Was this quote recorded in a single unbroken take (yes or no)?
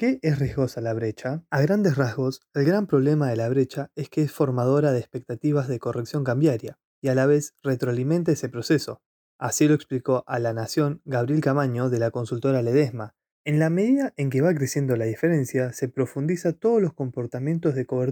yes